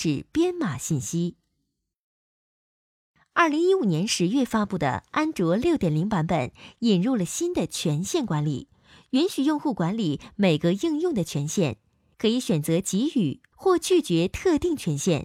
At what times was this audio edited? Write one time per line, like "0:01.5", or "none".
0:03.3

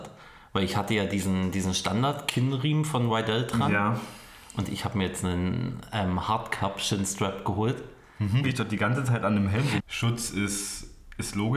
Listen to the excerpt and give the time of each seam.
0:08.4
0:09.8

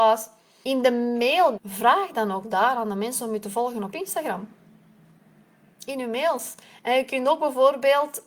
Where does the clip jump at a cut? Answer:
0:01.6

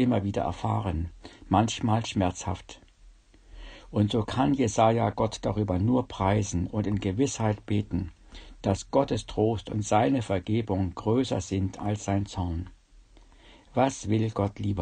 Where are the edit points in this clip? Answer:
0:03.8

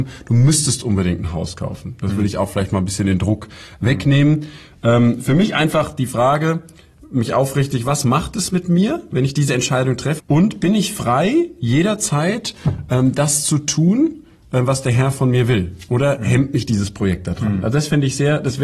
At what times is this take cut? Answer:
0:10.2

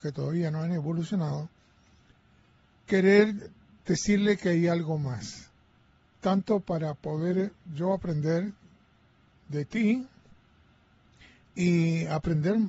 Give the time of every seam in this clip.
0:06.2

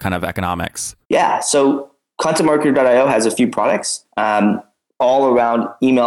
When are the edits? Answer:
0:01.0

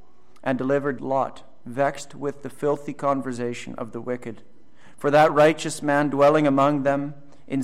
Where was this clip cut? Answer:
0:01.0

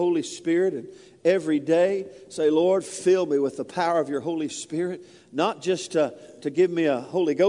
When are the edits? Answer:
none

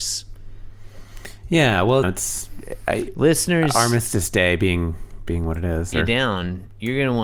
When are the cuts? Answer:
0:02.0
0:05.9

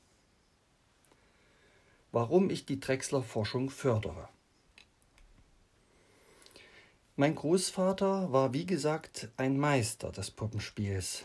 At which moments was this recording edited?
none

